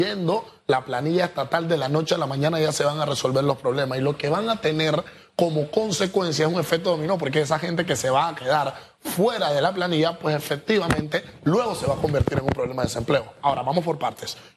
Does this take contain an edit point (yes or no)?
no